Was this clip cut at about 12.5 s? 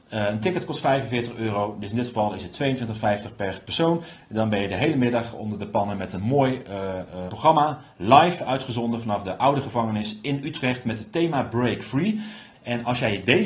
yes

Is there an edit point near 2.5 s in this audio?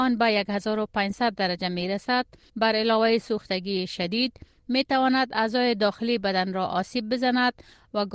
yes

